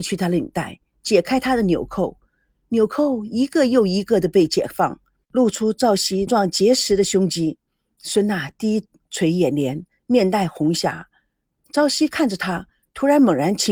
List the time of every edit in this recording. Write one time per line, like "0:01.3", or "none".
0:06.3

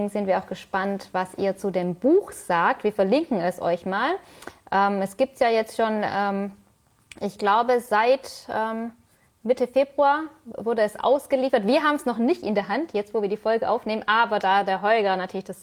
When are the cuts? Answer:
none

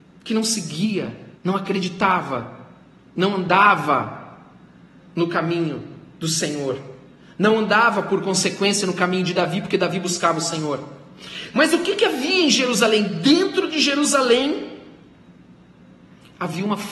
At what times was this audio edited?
0:01.4
0:11.5

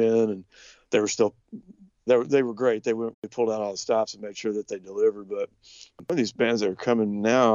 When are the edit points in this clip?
0:02.1
0:03.1

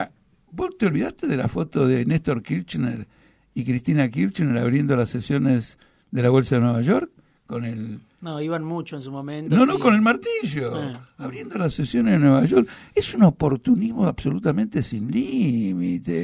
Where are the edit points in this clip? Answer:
none

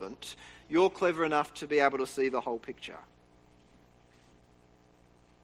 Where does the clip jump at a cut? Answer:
none

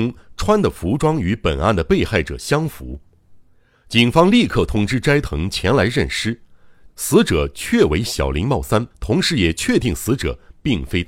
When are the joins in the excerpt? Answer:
0:06.9
0:08.9

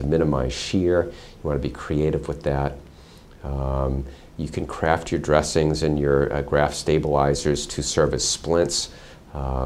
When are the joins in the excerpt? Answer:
none

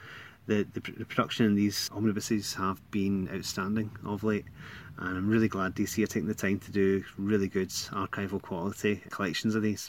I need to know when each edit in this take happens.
0:01.9

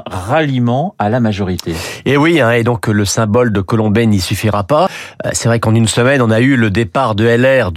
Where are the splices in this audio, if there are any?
none

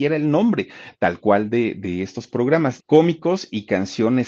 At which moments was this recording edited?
0:02.8

